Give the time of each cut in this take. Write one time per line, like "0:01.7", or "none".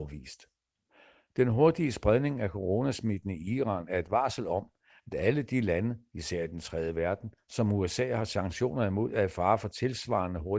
none

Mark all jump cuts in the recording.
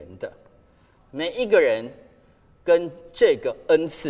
0:01.0

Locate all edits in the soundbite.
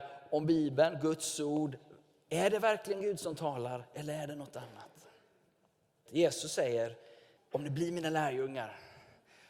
0:06.1
0:07.4

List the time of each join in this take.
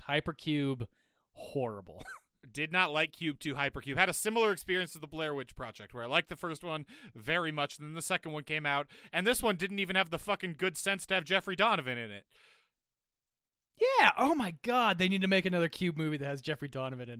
none

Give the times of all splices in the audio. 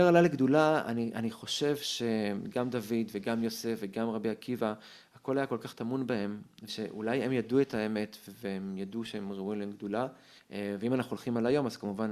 0:06.7
0:10.4

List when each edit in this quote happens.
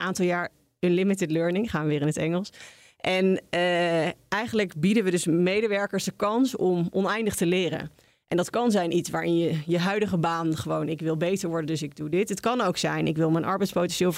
none

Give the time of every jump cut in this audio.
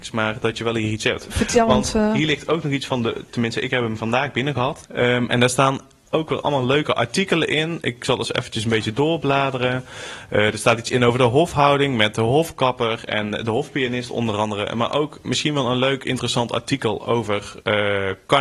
0:04.9

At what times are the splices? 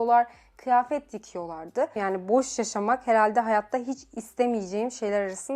0:02.0

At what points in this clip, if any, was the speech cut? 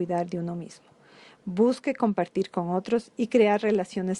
none

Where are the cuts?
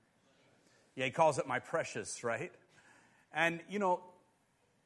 none

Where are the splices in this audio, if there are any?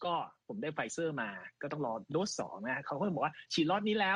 none

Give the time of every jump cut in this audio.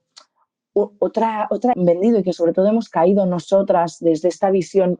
0:01.7

